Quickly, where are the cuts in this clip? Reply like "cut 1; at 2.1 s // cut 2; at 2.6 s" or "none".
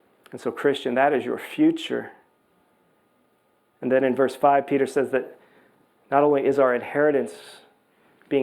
none